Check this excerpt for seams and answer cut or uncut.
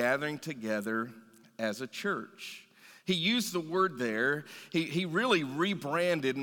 uncut